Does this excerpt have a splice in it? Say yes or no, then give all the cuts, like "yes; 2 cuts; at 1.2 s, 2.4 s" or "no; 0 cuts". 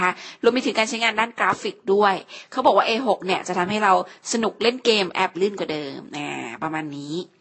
yes; 1 cut; at 5.3 s